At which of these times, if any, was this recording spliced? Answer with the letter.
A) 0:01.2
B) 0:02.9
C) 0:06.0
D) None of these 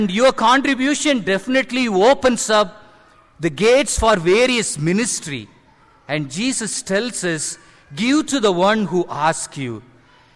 D